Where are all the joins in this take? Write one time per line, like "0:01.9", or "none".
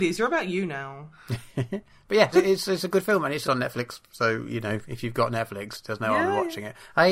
0:02.3
0:03.4